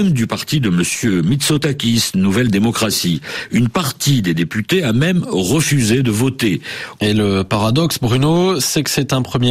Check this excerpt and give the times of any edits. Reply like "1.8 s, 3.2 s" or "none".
7.0 s